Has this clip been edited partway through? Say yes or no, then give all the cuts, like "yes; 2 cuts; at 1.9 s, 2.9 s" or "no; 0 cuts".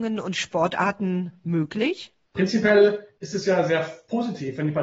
no; 0 cuts